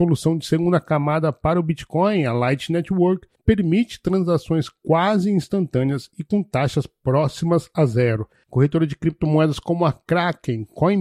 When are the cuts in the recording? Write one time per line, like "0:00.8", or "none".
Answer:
none